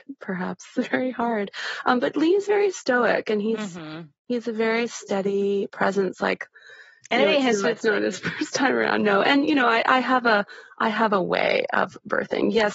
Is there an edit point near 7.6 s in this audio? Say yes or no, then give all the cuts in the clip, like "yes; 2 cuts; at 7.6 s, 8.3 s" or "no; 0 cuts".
yes; 1 cut; at 7.6 s